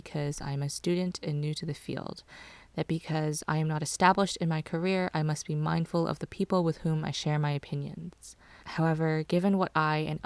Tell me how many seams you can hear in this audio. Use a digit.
1